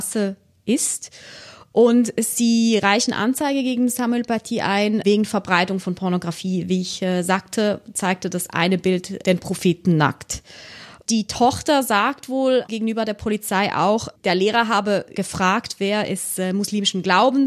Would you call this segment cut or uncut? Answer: uncut